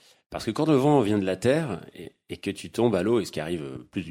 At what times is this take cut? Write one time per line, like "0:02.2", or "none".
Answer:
none

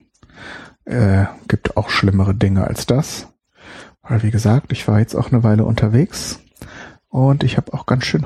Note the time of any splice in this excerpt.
none

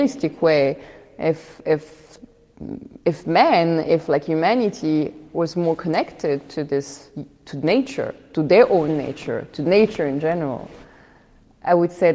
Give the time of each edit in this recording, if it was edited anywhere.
none

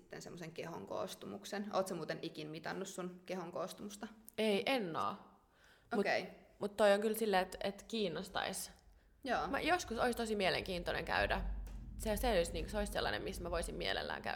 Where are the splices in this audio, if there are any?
none

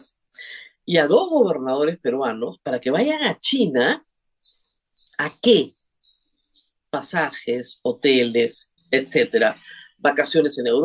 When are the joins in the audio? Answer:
0:06.8
0:08.8

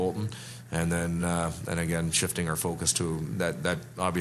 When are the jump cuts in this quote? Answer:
none

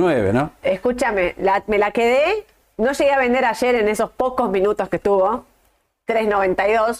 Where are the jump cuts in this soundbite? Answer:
none

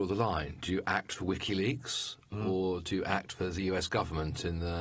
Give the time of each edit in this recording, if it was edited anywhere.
0:02.3

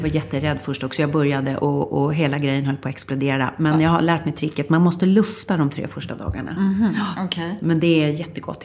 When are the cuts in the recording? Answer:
0:01.6

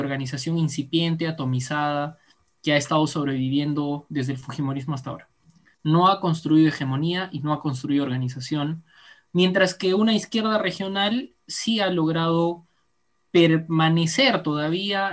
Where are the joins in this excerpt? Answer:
0:05.7

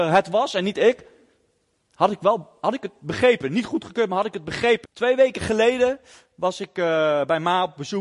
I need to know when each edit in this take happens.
0:04.8

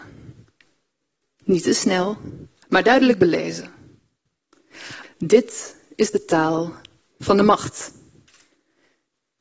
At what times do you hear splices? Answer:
0:02.6
0:05.0

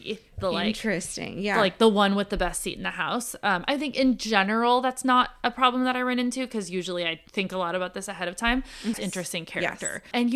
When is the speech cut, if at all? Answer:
0:07.3
0:08.9

